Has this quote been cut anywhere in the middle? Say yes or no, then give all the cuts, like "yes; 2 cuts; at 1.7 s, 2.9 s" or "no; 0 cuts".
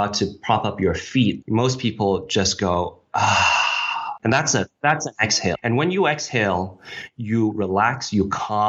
no; 0 cuts